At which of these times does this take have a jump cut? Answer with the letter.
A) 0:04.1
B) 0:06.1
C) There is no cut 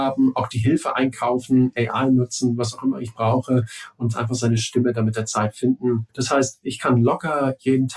B